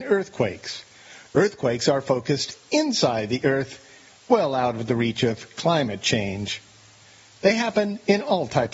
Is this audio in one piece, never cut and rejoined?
yes; 0 cuts

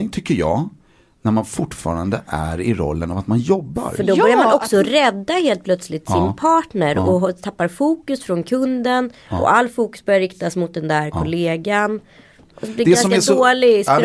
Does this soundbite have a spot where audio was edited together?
no; 0 cuts

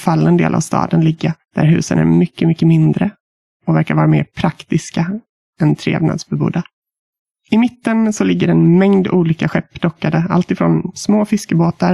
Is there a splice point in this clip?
no; 0 cuts

